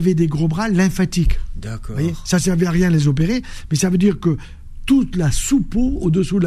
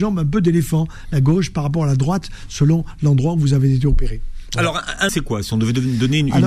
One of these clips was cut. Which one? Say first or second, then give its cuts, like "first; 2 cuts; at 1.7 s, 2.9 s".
second; 1 cut; at 5.1 s